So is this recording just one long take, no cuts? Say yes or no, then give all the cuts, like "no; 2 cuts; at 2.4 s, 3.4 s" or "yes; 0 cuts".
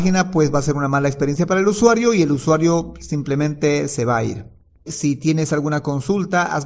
no; 1 cut; at 4.9 s